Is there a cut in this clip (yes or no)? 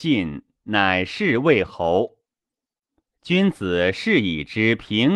no